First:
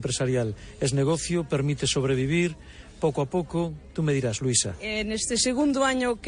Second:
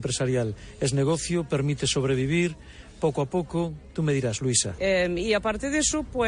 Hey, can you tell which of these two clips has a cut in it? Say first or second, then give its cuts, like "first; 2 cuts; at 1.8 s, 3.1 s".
second; 1 cut; at 4.8 s